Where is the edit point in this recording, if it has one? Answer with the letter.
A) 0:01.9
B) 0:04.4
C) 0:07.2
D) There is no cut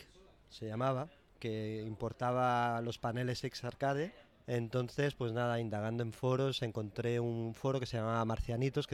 B